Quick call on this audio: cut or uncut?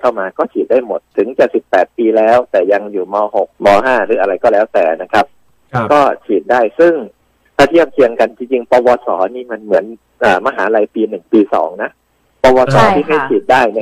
cut